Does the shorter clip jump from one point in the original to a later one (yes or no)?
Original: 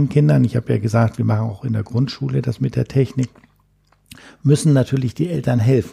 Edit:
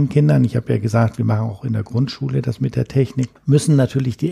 yes